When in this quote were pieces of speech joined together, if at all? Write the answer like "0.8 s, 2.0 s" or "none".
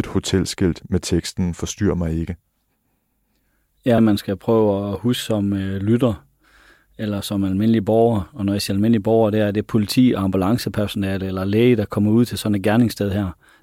4.0 s

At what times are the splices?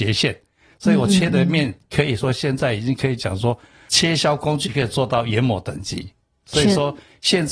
none

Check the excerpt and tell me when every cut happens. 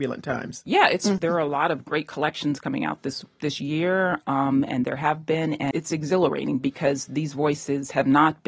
1.2 s, 5.7 s

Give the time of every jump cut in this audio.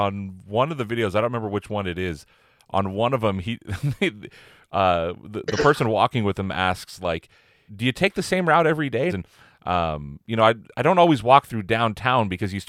7.7 s, 9.1 s

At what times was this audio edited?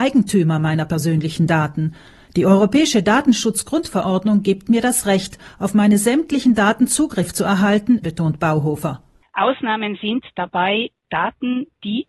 8.0 s

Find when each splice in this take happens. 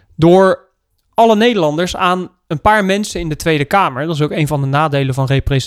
none

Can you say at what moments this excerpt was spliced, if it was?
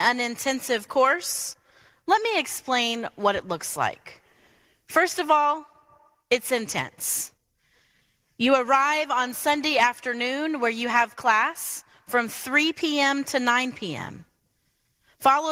none

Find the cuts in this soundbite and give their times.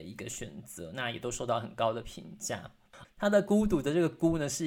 3.0 s

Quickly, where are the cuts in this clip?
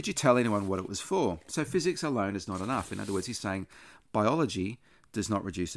none

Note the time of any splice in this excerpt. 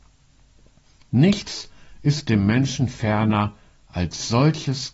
none

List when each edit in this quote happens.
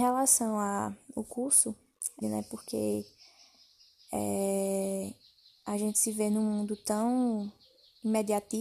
2.2 s

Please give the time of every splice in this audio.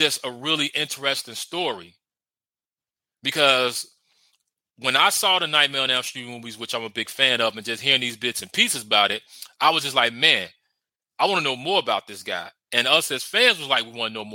none

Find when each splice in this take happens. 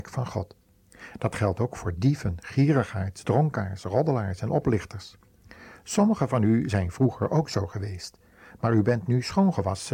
none

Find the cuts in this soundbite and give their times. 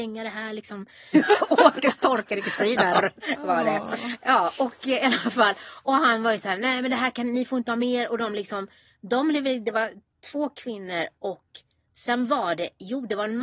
1.1 s

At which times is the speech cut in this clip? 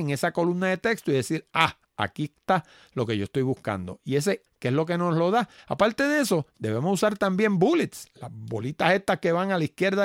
4.5 s, 5.6 s

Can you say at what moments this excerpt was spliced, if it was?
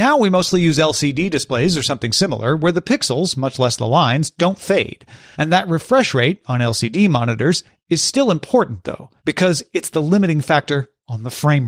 5.3 s, 9.2 s

